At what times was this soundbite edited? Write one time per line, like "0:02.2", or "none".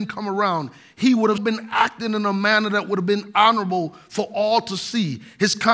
0:01.4

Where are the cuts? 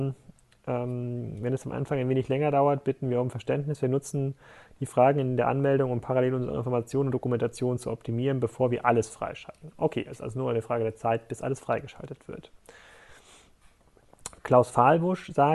none

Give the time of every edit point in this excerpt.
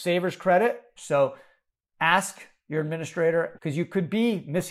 0:01.0
0:03.6

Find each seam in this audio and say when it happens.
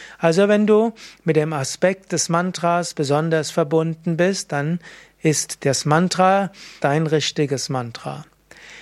0:06.8

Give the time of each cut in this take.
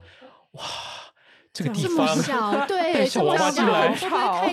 none

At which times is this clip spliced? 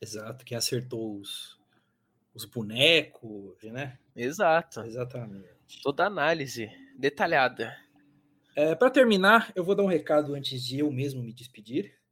0:03.6

